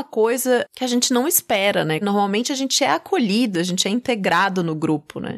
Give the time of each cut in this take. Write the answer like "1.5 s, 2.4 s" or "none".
2.0 s, 3.5 s